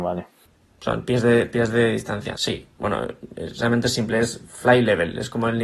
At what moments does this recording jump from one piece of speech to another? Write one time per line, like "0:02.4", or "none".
0:02.3